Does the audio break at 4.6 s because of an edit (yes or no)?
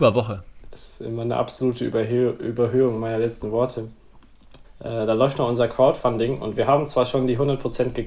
yes